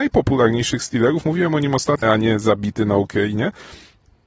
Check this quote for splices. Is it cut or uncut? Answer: cut